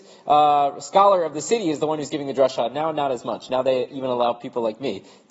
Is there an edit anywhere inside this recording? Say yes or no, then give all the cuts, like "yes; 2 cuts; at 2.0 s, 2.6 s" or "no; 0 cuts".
no; 0 cuts